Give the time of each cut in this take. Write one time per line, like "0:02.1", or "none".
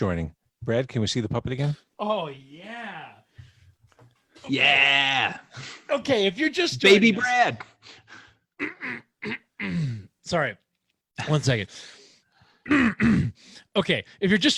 none